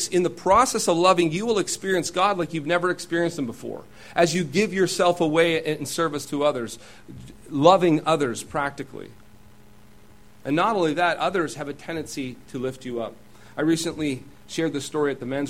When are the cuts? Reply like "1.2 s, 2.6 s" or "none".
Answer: none